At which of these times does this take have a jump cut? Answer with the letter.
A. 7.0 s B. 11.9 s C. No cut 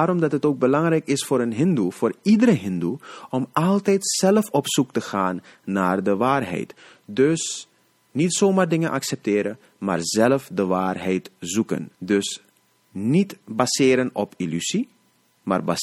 B